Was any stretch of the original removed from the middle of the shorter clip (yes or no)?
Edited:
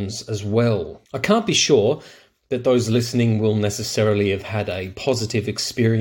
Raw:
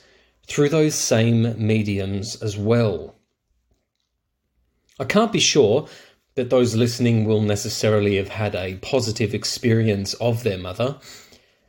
yes